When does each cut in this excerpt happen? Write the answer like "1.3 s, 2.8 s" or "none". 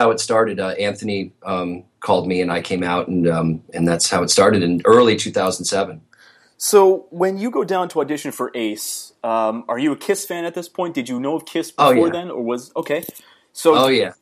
none